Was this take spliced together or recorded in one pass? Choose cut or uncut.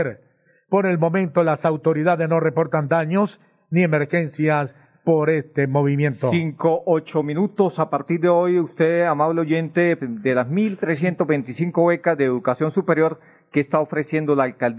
cut